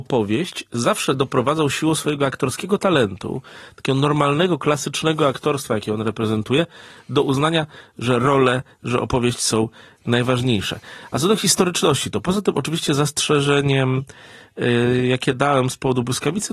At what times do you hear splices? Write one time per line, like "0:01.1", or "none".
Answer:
none